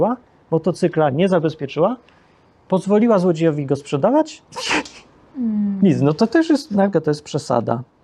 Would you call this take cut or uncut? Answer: cut